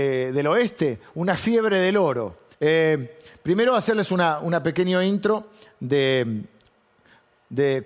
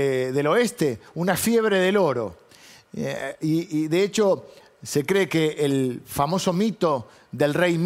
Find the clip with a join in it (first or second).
first